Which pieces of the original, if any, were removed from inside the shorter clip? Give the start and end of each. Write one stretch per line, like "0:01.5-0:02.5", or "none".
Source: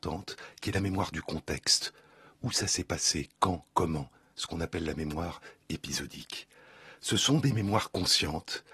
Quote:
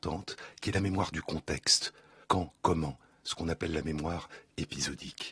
0:02.2-0:03.4